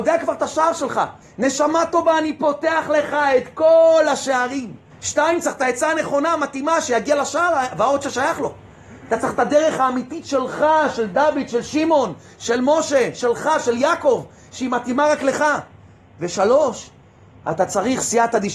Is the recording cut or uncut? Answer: cut